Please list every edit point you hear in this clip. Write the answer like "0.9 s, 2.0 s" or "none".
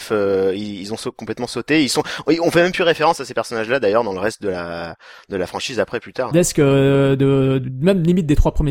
6.3 s